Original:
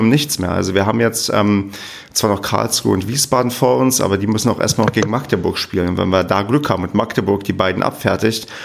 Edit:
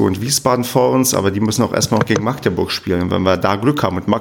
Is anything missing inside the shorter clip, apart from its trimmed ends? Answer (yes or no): no